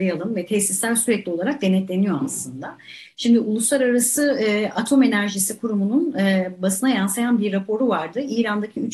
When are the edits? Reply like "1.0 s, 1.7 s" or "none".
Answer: none